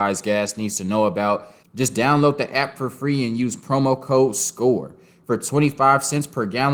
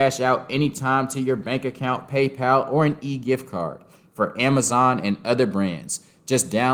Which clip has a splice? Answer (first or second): first